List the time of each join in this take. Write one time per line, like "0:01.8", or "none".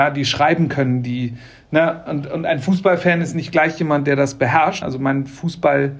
0:04.8